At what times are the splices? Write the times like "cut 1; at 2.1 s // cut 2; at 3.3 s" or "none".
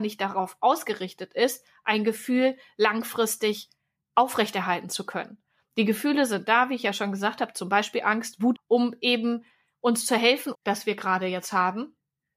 cut 1; at 8.5 s // cut 2; at 10.5 s